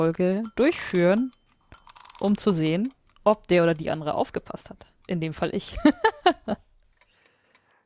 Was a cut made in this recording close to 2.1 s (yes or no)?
no